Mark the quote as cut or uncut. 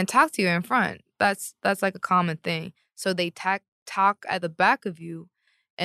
uncut